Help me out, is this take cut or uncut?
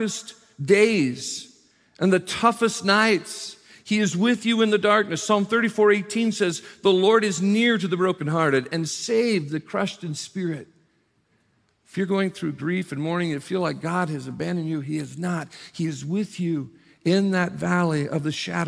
uncut